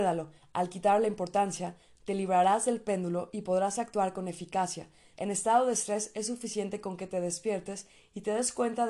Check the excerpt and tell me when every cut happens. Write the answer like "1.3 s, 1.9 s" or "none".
5.1 s